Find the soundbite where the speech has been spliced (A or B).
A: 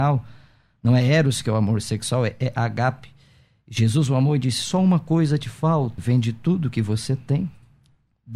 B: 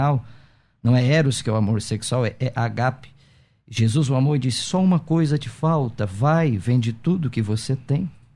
A